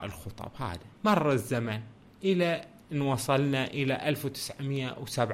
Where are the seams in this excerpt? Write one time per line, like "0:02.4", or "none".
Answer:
0:01.0